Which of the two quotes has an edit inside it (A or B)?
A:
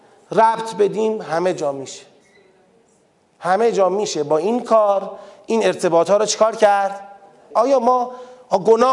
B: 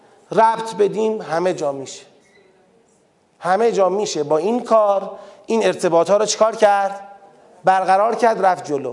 A